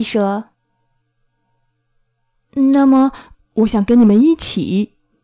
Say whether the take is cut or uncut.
cut